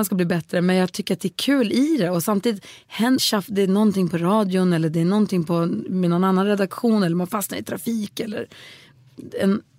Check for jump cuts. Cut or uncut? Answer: cut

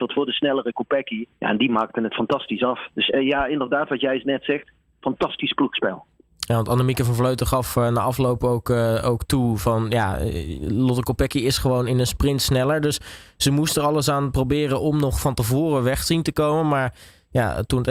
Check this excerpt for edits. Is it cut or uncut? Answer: cut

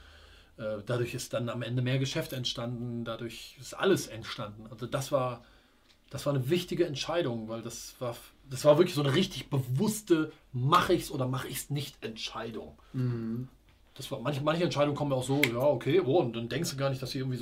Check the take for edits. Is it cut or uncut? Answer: uncut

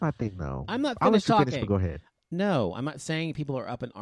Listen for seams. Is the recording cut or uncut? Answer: cut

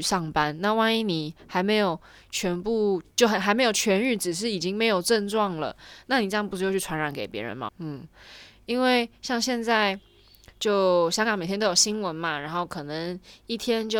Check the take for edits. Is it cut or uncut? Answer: cut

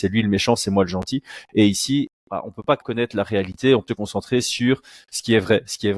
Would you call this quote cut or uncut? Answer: cut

